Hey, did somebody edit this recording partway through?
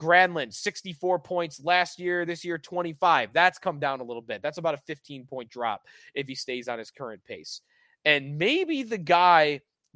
no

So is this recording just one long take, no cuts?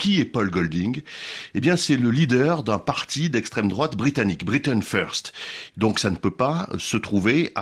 no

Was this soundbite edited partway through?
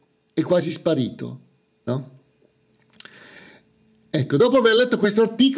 yes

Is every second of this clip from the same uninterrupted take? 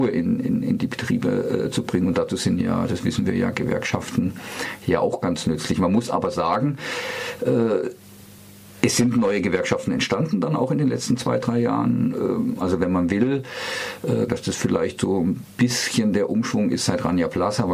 no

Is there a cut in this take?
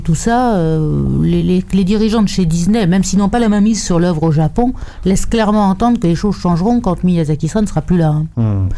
no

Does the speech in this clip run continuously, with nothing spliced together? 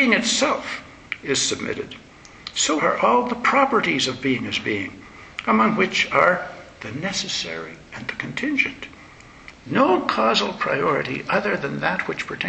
no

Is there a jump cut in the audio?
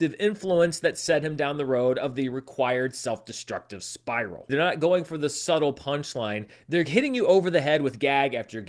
yes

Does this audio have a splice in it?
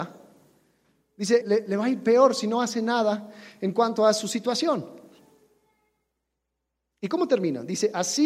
yes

